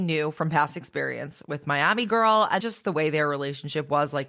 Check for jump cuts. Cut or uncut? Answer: cut